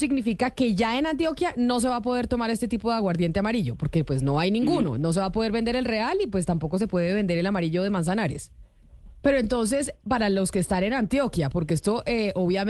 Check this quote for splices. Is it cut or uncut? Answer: cut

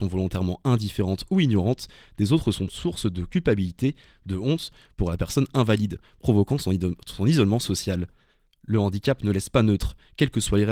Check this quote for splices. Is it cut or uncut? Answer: uncut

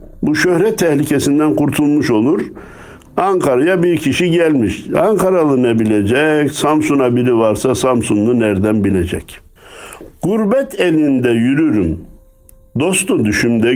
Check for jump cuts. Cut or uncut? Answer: uncut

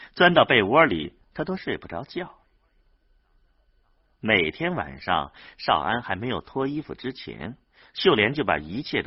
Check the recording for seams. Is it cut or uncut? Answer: uncut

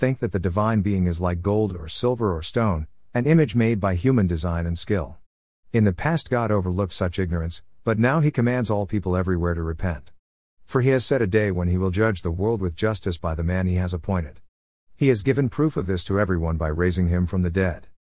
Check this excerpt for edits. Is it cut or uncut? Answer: uncut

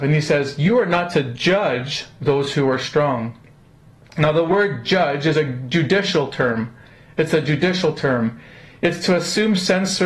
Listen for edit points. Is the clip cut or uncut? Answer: uncut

